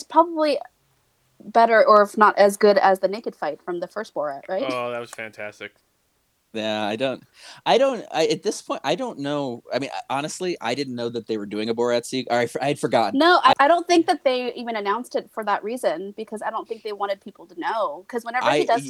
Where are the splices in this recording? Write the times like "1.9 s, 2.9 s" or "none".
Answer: 13.5 s